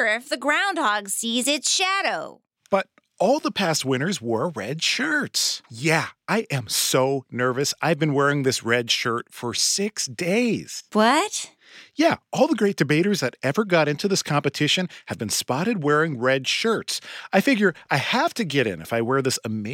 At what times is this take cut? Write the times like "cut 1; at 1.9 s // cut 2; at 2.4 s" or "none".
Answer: cut 1; at 5.7 s